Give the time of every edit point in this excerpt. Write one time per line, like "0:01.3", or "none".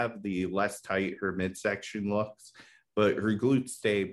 none